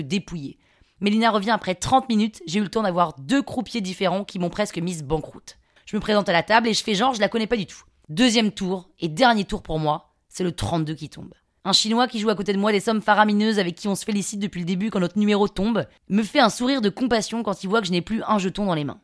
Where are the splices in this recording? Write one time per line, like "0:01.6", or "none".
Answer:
0:05.8
0:08.0

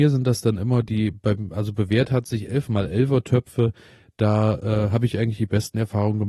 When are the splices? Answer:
none

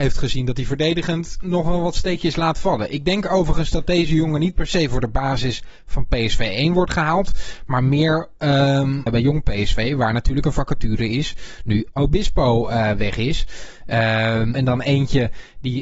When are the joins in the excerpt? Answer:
0:09.1
0:14.5

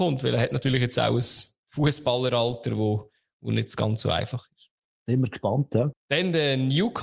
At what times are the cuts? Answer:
0:05.9

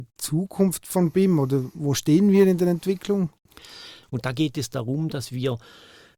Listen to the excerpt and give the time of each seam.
0:04.0

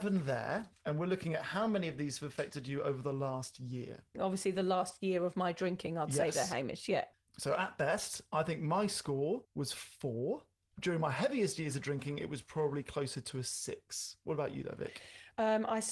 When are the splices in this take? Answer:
0:04.1
0:09.4

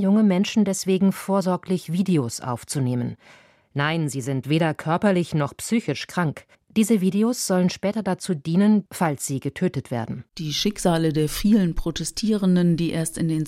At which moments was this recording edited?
0:06.5
0:08.9
0:10.3

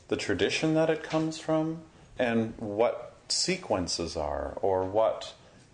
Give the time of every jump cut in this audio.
0:02.2

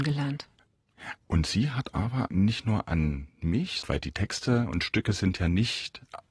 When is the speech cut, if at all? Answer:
0:01.2
0:03.8

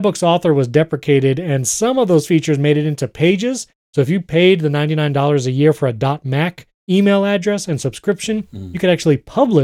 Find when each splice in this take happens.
0:03.8

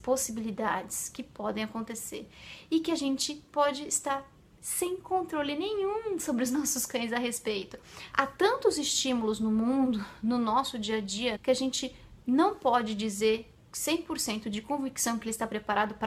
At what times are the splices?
0:08.1
0:11.4

